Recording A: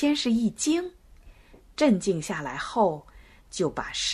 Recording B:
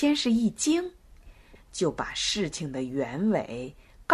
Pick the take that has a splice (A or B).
B